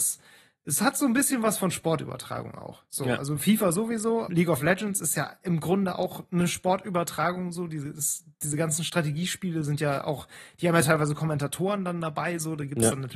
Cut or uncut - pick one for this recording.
cut